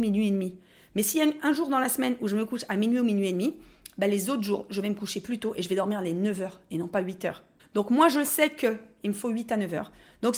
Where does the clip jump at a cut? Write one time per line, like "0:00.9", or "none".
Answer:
0:07.6